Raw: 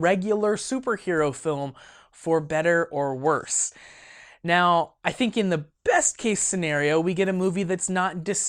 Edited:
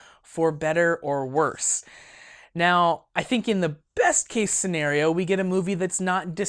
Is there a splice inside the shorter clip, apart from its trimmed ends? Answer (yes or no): no